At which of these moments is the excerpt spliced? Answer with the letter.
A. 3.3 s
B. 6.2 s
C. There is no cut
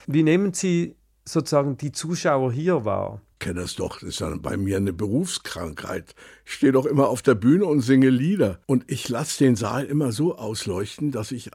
C